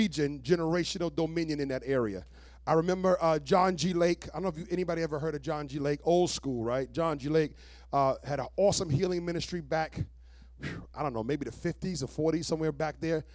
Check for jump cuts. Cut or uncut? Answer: uncut